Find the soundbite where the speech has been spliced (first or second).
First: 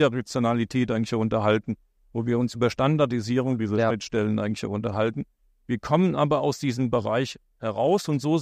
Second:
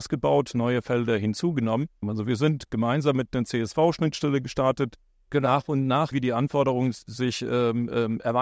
second